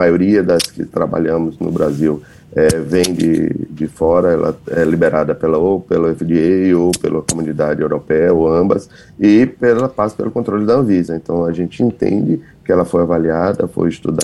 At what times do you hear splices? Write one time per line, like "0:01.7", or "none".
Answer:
none